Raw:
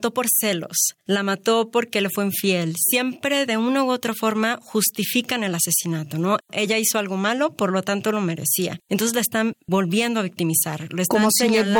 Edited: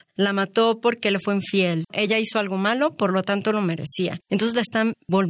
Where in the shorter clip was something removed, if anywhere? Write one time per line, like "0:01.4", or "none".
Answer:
0:01.8